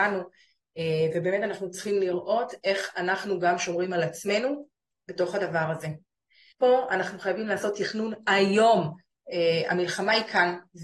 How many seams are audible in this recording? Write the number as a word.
two